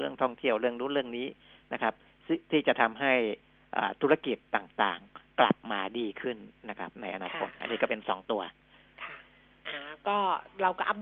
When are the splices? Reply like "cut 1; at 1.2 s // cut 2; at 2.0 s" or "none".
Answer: cut 1; at 7.6 s